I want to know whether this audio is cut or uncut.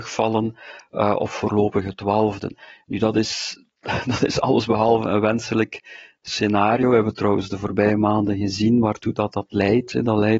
uncut